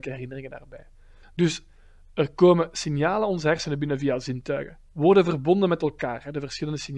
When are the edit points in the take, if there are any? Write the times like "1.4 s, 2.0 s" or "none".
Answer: 1.2 s